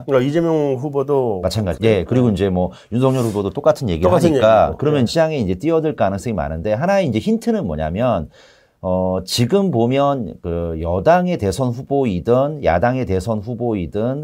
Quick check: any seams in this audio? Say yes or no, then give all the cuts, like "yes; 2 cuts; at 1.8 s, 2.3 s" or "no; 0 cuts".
yes; 2 cuts; at 1.8 s, 5.1 s